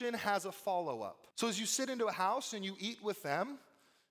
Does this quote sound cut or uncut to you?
cut